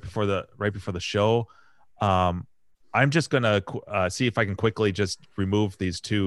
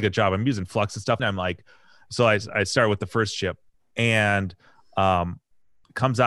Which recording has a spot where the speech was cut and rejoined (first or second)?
second